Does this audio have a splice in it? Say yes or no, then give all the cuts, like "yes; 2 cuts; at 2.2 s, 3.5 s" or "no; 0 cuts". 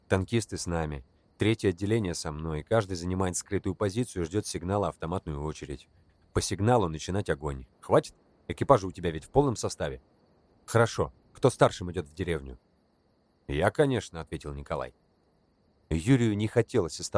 yes; 1 cut; at 7.7 s